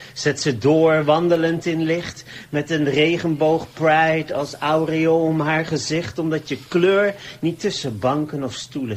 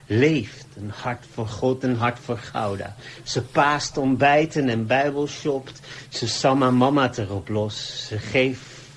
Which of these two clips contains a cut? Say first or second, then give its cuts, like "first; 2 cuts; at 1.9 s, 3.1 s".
second; 3 cuts; at 1.8 s, 3.2 s, 6.0 s